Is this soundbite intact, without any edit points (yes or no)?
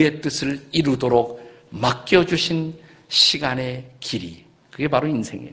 yes